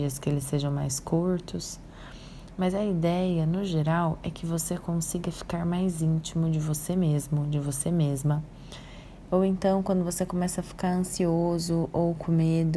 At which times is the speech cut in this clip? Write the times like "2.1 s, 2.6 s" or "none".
9.3 s